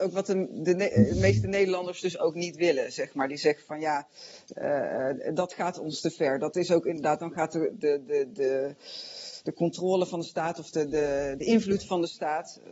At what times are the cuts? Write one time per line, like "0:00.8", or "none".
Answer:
none